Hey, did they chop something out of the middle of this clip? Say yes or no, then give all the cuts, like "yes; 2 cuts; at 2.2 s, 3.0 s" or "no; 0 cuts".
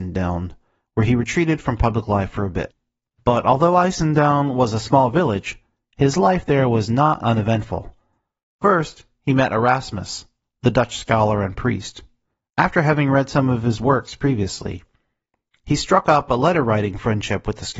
no; 0 cuts